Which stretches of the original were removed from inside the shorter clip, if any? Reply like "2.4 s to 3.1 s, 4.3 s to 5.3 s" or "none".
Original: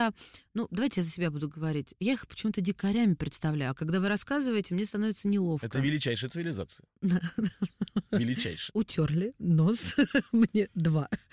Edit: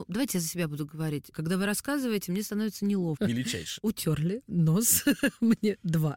1.9 s to 3.7 s, 5.6 s to 8.1 s